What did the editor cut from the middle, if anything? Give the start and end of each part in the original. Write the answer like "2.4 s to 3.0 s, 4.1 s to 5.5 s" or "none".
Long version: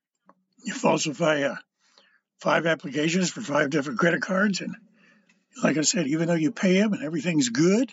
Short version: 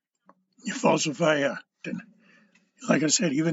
1.8 s to 4.6 s